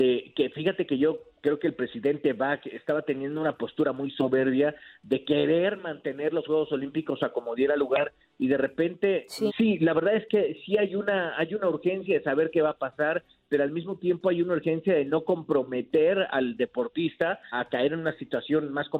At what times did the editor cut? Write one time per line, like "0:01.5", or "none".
0:09.5
0:17.5